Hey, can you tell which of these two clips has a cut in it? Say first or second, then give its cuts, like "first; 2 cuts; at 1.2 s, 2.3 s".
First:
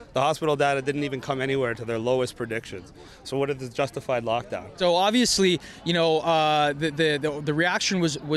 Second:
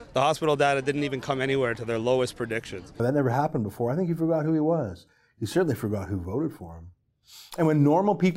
second; 1 cut; at 3.0 s